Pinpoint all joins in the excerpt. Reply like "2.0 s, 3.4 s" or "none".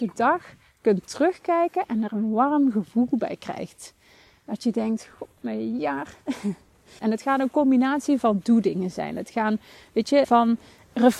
7.0 s, 10.2 s